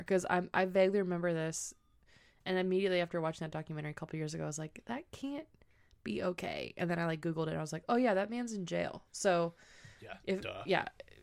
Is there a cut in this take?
no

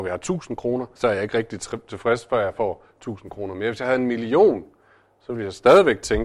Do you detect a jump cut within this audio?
yes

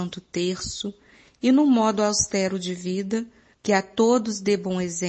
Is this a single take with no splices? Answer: no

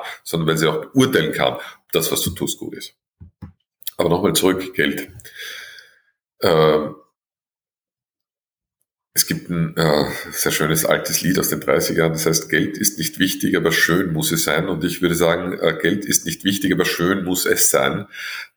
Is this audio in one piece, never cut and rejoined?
yes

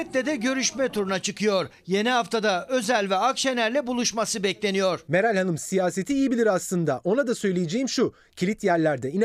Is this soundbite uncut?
yes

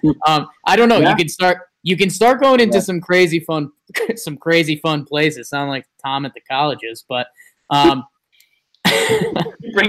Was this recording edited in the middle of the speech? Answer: no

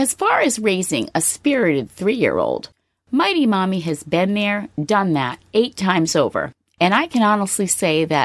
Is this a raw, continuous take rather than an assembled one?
yes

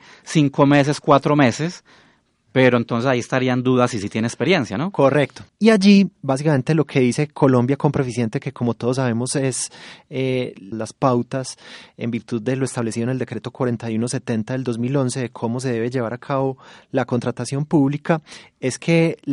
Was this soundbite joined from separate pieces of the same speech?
yes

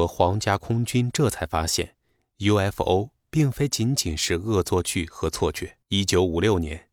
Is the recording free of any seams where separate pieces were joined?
no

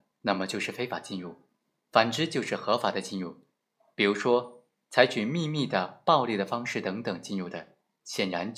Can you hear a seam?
no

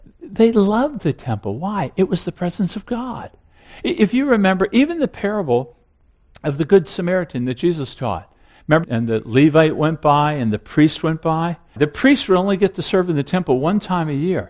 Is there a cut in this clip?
yes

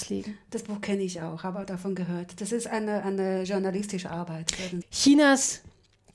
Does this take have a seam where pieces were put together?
yes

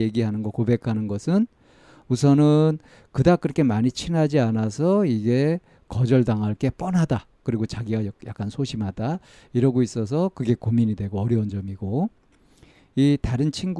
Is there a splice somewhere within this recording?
yes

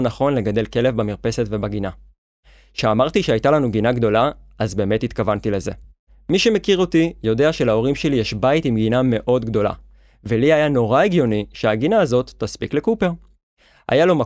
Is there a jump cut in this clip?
no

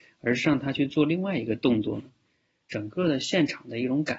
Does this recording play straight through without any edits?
no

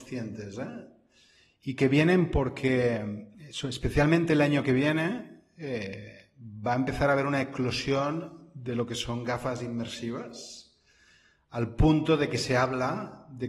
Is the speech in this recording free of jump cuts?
no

